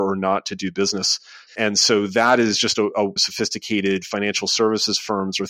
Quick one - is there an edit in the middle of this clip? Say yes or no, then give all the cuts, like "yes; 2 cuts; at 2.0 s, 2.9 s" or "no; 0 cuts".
yes; 2 cuts; at 1.5 s, 3.2 s